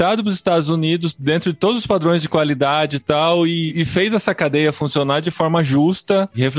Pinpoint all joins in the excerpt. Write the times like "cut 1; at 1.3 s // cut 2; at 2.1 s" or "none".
none

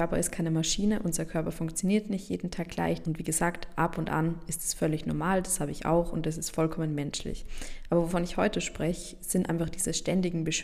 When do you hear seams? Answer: cut 1; at 3.0 s

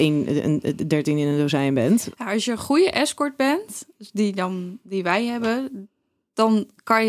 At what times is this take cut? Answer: none

